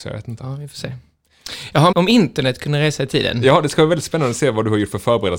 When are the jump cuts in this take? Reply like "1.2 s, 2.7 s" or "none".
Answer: 1.9 s